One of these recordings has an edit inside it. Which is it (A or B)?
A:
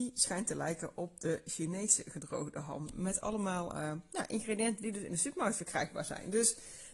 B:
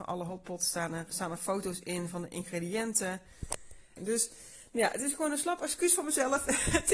B